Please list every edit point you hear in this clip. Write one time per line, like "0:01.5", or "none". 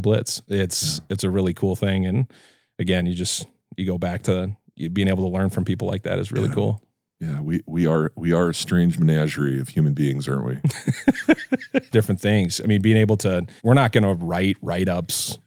0:11.9
0:13.6